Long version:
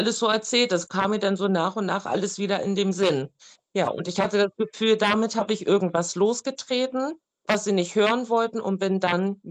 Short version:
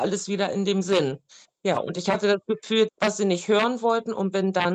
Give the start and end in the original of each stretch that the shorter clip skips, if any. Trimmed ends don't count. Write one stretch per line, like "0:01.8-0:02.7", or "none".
0:05.0-0:07.4